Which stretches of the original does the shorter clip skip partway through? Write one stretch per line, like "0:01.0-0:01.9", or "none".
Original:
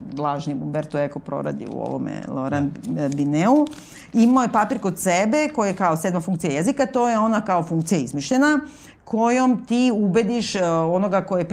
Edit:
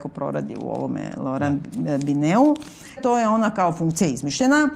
0:04.1-0:06.9